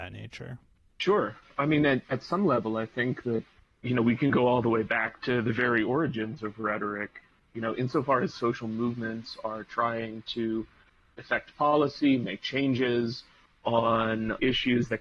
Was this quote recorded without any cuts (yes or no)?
yes